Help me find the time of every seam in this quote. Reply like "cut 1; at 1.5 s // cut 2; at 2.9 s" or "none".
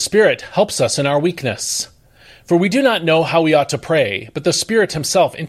none